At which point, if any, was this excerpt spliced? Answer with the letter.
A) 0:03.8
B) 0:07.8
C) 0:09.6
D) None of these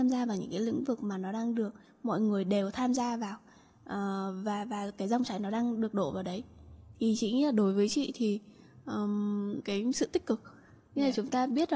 C